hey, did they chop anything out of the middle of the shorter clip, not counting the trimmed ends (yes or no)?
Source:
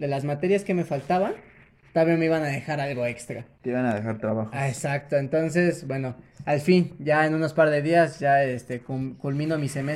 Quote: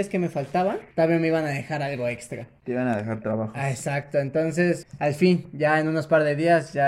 yes